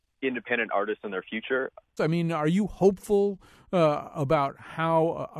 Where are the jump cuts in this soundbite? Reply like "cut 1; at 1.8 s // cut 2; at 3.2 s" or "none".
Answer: cut 1; at 2.0 s